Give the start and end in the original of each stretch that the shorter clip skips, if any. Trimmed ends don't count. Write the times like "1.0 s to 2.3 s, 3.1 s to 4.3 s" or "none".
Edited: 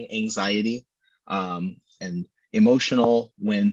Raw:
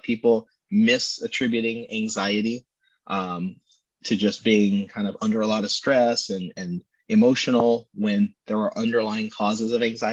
3.8 s to 6.5 s